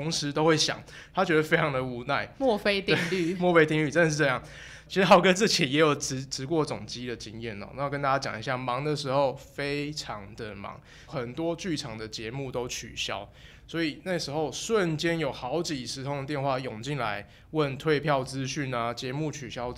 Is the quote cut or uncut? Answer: cut